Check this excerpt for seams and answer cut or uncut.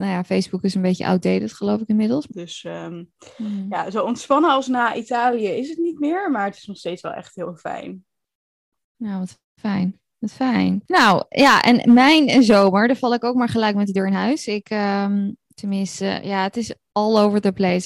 cut